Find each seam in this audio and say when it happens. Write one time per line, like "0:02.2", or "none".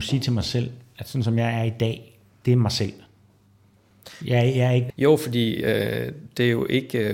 0:04.9